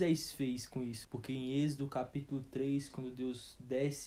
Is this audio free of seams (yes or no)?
no